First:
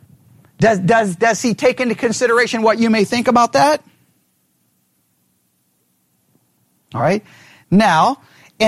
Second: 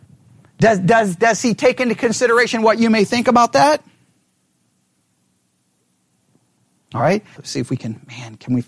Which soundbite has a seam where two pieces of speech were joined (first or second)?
second